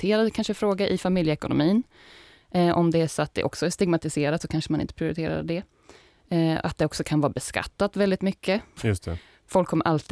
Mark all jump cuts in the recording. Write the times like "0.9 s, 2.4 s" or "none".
8.8 s